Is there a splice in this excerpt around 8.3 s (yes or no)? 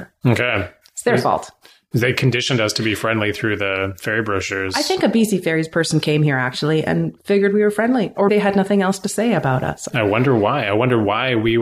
yes